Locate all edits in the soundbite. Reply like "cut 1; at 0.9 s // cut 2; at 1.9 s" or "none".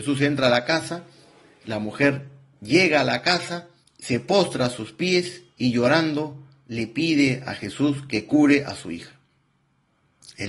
cut 1; at 3.8 s